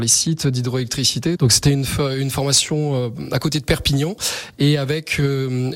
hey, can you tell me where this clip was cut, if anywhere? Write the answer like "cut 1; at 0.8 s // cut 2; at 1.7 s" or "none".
cut 1; at 1.4 s

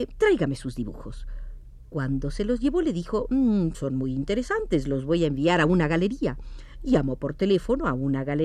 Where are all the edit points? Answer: none

